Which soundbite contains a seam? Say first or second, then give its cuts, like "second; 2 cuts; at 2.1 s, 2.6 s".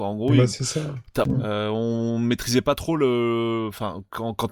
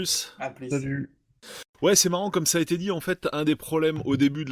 first; 1 cut; at 1.2 s